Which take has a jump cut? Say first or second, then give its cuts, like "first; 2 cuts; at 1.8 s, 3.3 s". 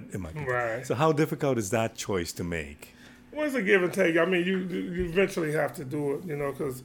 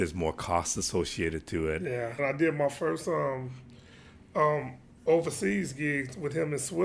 second; 1 cut; at 2.2 s